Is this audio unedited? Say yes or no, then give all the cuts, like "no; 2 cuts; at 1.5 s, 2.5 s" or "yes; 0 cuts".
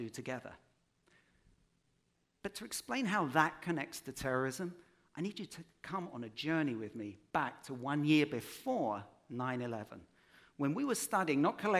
yes; 0 cuts